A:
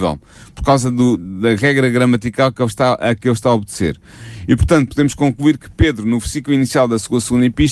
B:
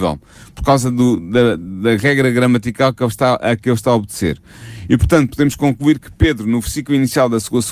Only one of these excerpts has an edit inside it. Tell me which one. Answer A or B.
A